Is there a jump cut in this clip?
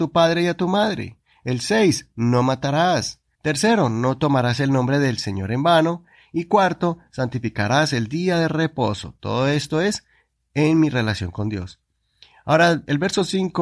yes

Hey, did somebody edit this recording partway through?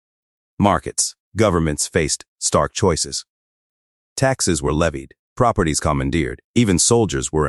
no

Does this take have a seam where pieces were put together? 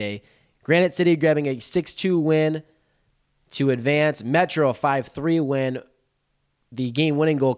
no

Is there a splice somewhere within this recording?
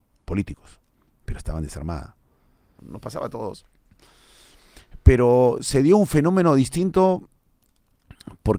yes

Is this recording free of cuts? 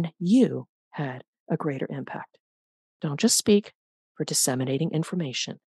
no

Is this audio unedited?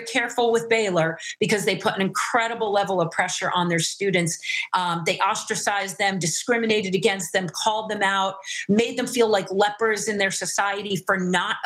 yes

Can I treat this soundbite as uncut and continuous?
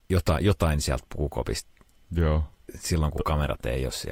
yes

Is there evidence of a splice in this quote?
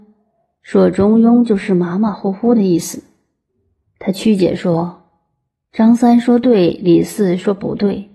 no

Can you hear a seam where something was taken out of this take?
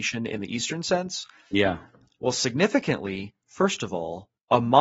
no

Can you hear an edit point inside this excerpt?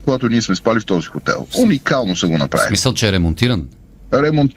no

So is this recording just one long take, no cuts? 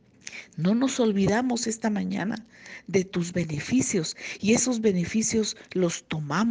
yes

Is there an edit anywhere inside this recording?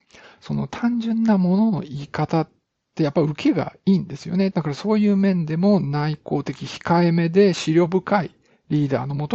yes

